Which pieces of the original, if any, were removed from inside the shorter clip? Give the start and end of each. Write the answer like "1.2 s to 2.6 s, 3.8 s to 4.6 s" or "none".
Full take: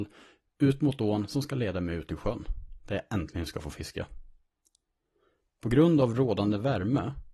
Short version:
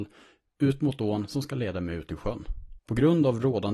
2.8 s to 5.5 s